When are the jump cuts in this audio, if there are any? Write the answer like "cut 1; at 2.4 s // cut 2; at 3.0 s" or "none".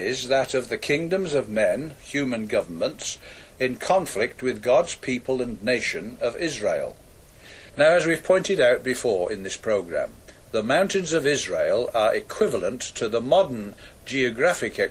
cut 1; at 2.0 s // cut 2; at 7.7 s